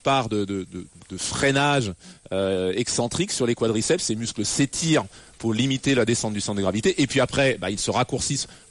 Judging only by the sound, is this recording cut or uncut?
uncut